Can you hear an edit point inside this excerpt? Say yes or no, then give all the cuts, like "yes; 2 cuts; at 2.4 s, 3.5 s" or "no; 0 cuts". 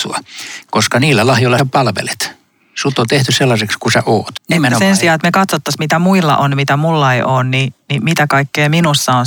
yes; 2 cuts; at 1.6 s, 4.3 s